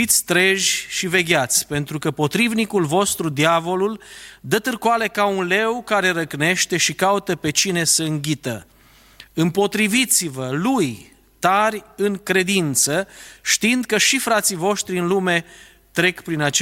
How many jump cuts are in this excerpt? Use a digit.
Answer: 0